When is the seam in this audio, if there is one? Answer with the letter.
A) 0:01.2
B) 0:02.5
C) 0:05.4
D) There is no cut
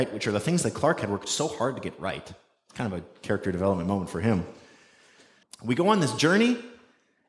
C